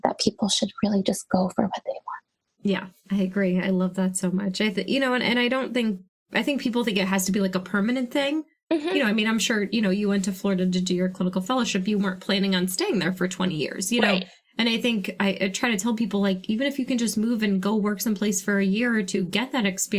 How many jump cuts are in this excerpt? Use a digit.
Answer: 0